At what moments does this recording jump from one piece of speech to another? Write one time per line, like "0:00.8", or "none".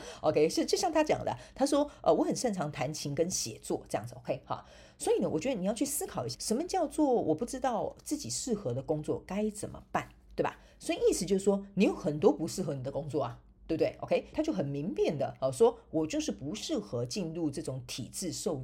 0:06.3
0:14.3